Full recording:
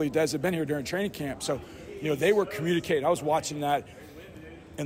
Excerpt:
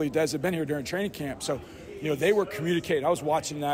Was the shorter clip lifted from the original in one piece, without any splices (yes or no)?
yes